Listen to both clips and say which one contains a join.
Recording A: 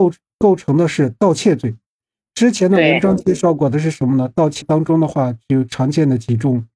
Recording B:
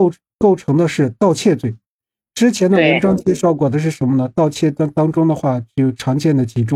A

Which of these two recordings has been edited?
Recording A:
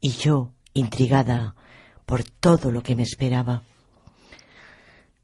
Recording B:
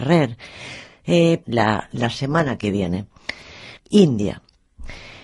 B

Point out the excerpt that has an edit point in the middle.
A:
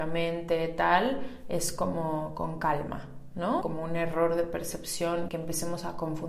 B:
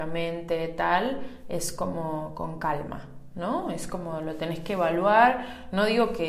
A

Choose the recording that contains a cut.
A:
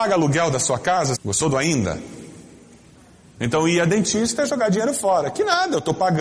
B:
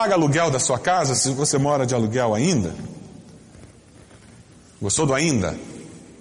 A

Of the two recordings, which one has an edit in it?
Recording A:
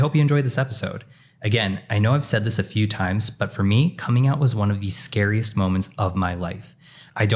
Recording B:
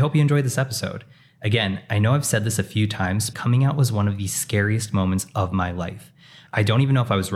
B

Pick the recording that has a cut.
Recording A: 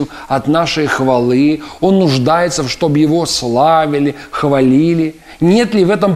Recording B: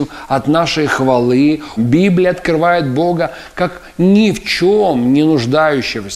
B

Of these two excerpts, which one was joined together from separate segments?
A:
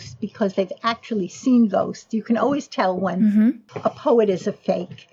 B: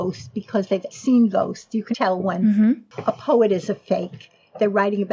B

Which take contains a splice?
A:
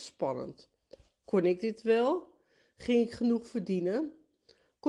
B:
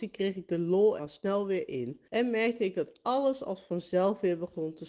B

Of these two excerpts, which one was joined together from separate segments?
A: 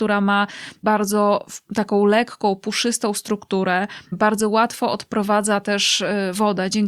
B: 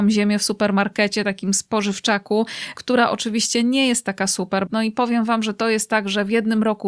B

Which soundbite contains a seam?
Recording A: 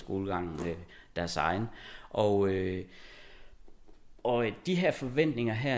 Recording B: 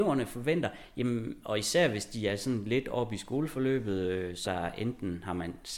B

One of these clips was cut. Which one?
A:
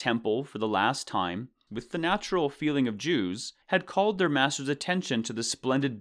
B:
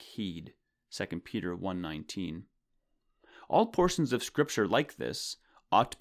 A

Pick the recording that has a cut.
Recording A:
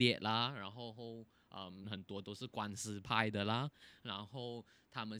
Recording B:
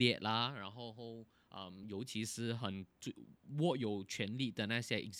A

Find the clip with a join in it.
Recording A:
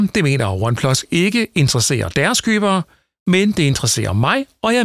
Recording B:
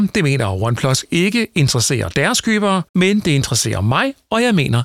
B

